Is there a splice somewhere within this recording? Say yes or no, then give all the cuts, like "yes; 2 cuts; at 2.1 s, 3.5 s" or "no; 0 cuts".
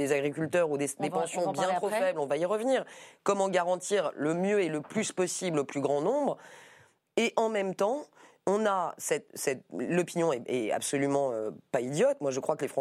no; 0 cuts